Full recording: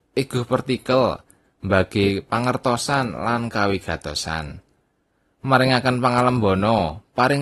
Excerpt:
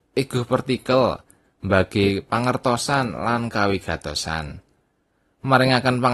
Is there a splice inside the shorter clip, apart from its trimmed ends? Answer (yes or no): no